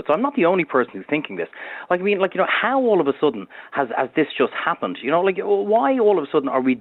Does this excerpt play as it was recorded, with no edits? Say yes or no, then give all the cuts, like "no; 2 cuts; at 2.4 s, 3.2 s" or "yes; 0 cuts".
yes; 0 cuts